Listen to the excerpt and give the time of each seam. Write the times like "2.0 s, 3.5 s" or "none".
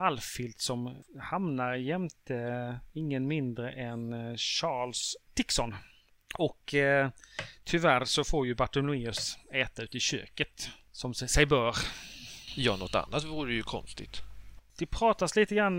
none